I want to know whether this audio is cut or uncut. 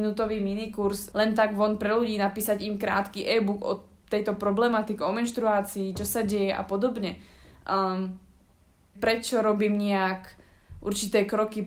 cut